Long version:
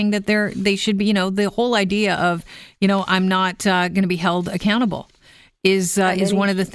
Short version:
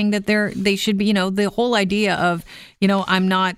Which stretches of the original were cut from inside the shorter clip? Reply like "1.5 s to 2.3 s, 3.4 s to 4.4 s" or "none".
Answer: none